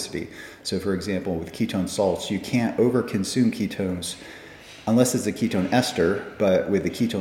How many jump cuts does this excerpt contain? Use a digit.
0